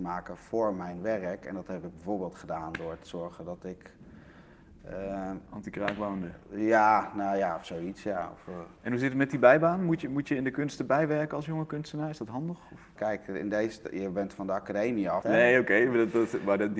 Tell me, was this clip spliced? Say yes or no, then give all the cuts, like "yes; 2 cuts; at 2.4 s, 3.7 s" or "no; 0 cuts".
yes; 2 cuts; at 13.0 s, 15.2 s